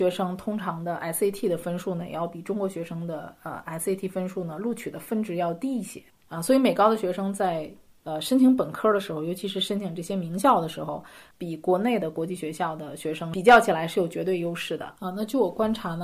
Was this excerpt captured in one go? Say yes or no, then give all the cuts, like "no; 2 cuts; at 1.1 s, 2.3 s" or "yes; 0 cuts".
yes; 0 cuts